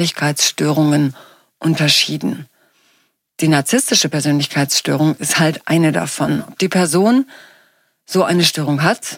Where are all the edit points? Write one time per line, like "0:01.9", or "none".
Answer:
none